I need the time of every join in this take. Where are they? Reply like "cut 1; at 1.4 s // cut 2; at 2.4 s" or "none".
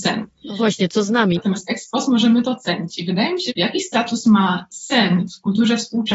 cut 1; at 1.4 s // cut 2; at 3.5 s